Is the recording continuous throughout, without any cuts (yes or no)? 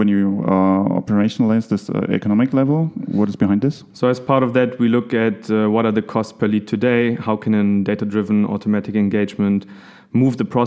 yes